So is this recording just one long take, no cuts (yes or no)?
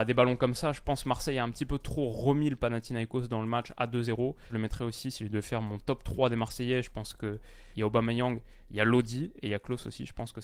no